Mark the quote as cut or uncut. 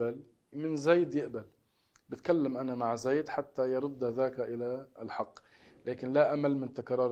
uncut